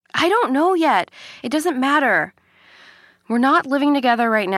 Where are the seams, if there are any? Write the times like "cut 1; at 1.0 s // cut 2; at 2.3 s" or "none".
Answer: none